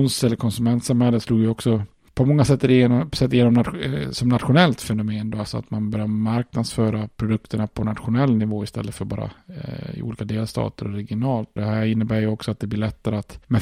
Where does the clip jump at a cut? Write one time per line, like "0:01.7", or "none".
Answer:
0:11.6